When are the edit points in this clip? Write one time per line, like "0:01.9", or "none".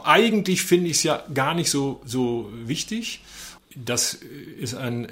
0:03.6

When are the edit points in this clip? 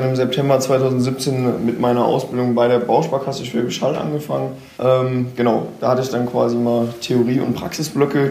0:04.8

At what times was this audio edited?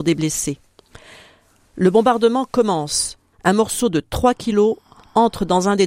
0:03.3

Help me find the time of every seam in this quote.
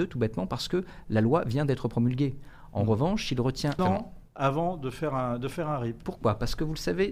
0:03.8
0:06.0

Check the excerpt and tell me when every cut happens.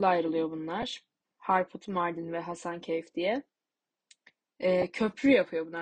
0:01.3

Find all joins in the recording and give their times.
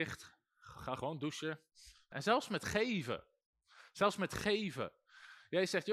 0:02.1

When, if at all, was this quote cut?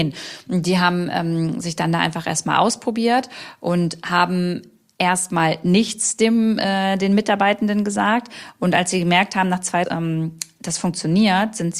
0:09.8

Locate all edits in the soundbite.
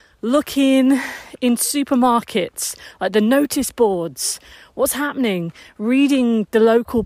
none

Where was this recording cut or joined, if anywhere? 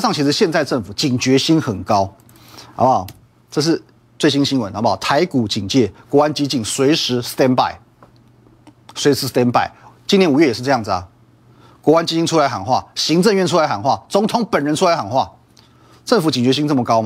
none

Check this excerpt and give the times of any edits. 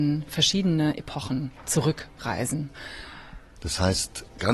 0:03.6

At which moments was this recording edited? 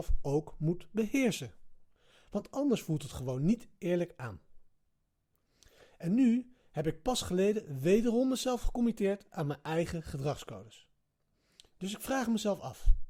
0:11.6

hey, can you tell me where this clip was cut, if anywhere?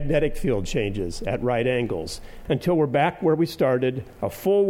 0:02.4

